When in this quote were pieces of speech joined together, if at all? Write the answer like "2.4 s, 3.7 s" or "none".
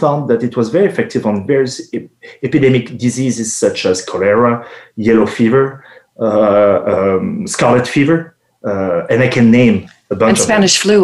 none